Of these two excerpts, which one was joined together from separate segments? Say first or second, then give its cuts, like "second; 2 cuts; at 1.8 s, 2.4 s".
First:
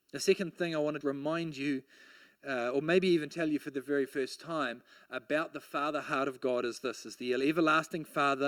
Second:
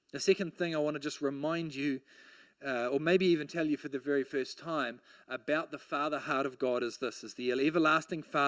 first; 1 cut; at 1.0 s